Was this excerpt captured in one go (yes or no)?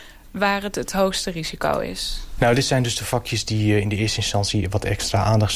no